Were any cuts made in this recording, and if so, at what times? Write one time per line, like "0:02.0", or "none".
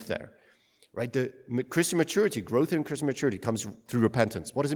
none